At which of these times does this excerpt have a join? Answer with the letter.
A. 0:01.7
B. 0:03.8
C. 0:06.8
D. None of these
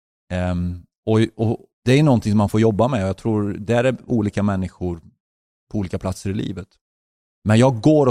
A